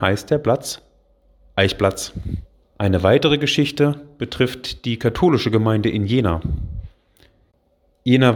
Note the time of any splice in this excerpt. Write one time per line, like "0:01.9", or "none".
0:02.6